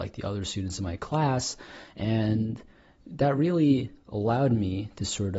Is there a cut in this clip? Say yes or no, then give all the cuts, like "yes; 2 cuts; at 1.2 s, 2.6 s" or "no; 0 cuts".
no; 0 cuts